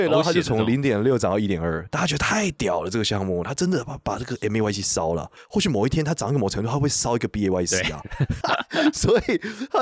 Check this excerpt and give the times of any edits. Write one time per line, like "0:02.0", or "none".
0:08.4